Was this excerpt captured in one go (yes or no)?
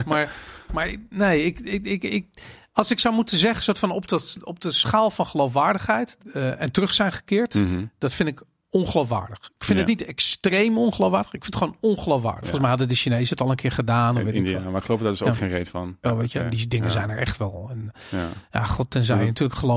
no